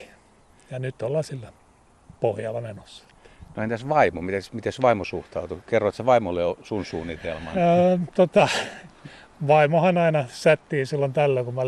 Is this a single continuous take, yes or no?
yes